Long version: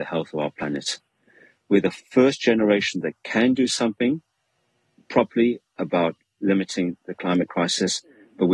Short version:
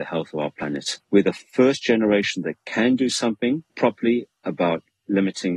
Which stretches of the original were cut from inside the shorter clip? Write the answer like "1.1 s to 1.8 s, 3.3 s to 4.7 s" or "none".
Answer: 1.0 s to 1.6 s, 4.3 s to 5.0 s